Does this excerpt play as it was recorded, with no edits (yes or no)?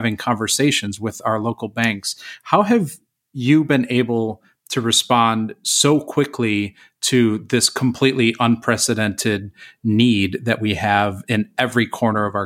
yes